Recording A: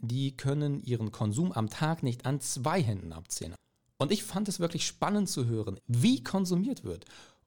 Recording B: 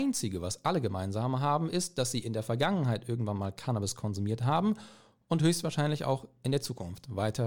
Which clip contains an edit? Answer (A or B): A